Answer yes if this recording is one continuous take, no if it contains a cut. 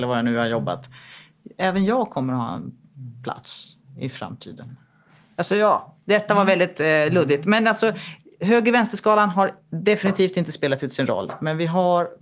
yes